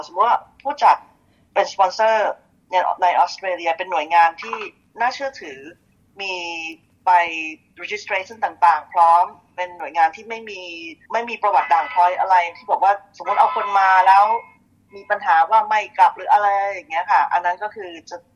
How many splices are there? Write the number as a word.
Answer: one